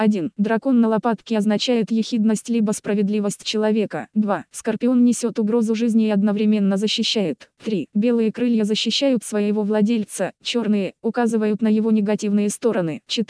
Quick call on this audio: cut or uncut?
uncut